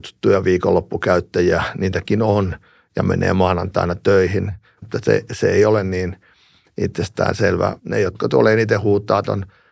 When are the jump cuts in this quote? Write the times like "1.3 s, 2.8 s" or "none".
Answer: 4.8 s, 7.8 s